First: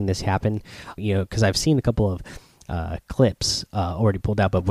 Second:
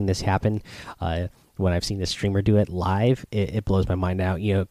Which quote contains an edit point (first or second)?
first